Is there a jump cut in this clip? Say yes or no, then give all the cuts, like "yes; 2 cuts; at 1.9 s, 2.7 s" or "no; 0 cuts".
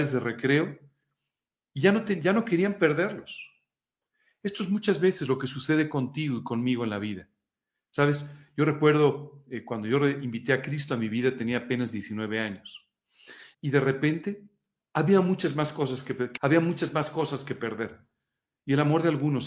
yes; 2 cuts; at 13.5 s, 16.4 s